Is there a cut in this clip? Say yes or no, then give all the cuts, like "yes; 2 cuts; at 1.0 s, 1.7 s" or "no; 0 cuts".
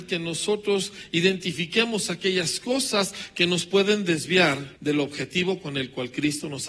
yes; 1 cut; at 4.8 s